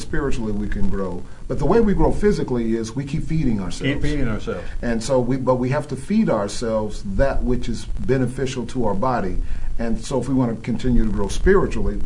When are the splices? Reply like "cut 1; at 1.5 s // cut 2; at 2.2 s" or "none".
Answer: none